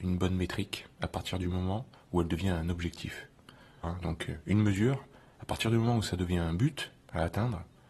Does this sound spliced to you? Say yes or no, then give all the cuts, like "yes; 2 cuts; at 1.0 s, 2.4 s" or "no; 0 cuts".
yes; 1 cut; at 3.8 s